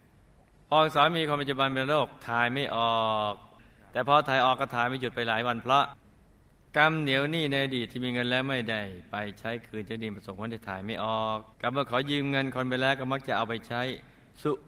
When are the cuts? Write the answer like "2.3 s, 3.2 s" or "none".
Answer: 11.5 s